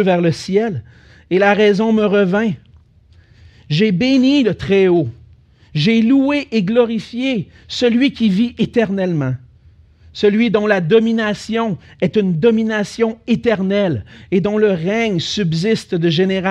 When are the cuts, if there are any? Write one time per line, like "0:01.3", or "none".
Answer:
none

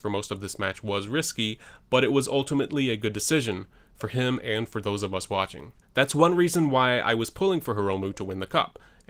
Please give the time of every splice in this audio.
0:05.8

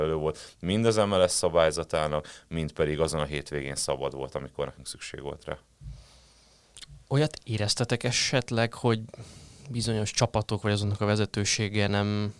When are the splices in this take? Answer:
none

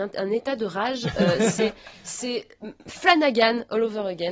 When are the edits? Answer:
none

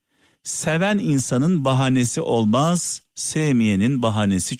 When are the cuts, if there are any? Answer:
0:03.1

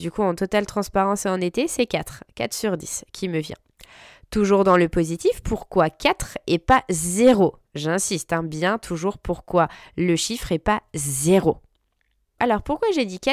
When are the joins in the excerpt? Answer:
0:12.4

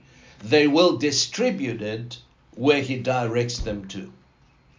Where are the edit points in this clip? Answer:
none

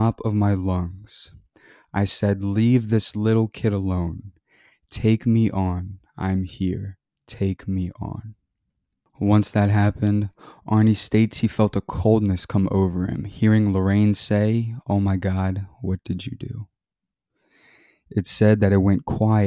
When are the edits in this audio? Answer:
none

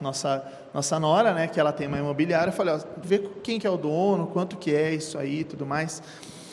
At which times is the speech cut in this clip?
0:03.0

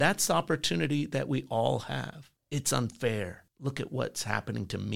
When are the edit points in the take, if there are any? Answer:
0:02.4

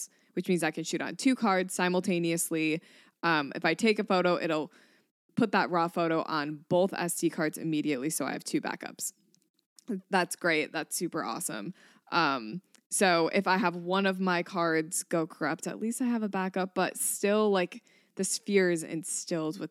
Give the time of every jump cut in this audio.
none

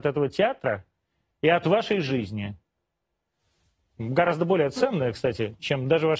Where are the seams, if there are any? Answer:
none

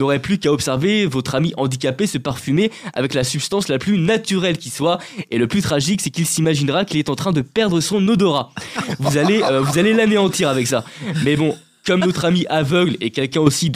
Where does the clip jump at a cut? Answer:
none

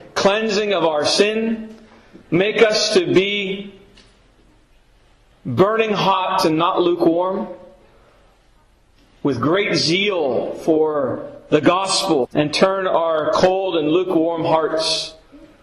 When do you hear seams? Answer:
0:02.2
0:12.2

